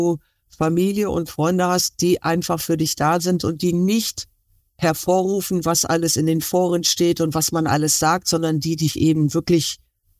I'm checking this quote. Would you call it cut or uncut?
uncut